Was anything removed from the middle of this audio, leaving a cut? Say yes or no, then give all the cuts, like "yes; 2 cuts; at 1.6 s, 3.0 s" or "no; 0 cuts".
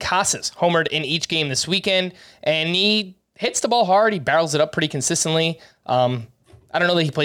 no; 0 cuts